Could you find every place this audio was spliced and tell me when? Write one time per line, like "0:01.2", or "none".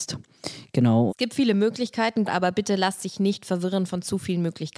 0:01.1
0:02.3